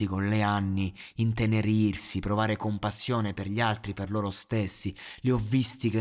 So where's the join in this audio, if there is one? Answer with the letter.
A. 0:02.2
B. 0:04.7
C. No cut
C